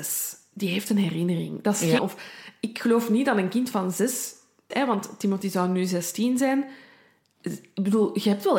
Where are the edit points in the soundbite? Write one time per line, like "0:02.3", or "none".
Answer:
0:02.0
0:04.7